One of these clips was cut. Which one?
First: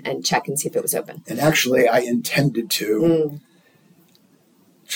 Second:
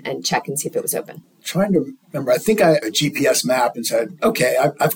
second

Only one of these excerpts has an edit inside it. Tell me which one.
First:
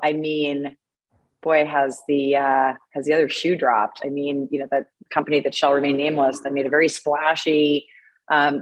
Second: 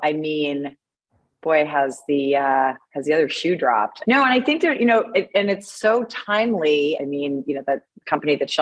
second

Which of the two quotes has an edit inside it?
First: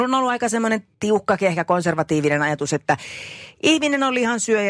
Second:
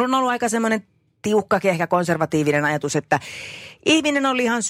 first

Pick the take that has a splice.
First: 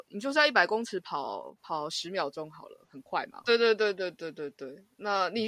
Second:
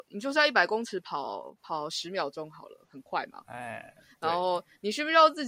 first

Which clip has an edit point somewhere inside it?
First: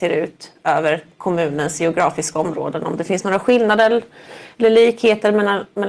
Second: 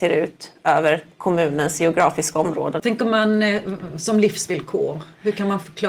second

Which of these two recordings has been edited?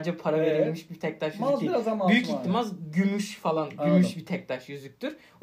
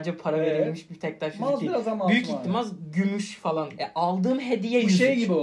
second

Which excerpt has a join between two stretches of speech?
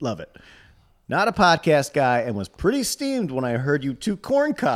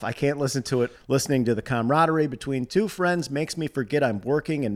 second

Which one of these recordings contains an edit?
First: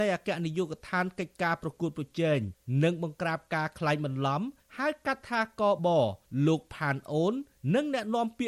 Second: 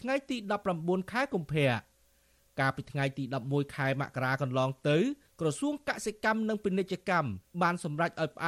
first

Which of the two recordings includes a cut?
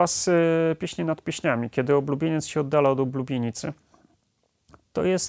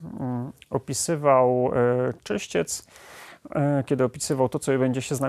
second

